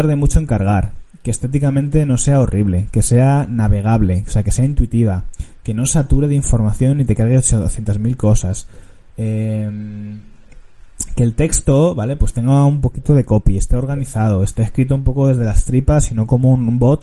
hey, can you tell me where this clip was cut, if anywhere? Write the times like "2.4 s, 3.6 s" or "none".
none

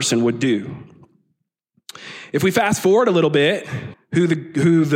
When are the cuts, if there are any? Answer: 3.9 s

